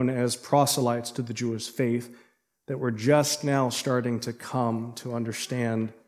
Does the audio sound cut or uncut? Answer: uncut